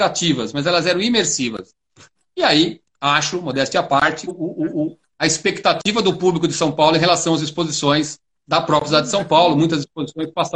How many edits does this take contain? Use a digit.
2